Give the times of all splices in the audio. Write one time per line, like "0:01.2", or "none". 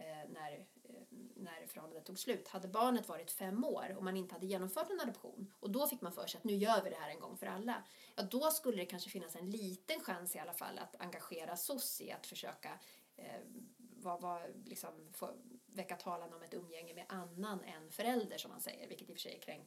none